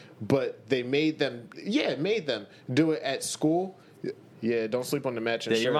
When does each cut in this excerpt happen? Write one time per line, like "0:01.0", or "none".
0:01.5
0:04.3